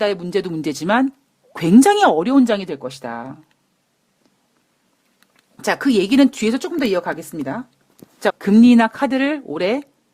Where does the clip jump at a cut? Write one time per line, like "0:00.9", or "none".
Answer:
0:08.3